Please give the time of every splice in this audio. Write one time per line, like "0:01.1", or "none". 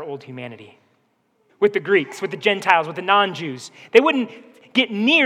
0:01.5